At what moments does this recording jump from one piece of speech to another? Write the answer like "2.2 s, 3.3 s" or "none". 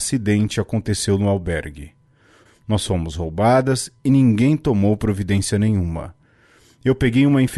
2.5 s